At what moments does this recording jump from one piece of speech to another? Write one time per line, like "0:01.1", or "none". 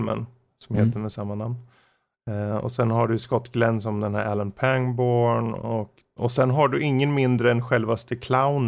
0:06.2